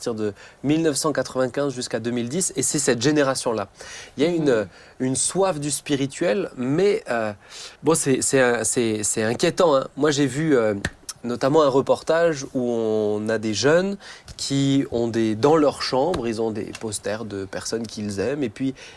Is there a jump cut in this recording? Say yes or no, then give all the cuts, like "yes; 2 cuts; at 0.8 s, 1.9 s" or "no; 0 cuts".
yes; 1 cut; at 7.8 s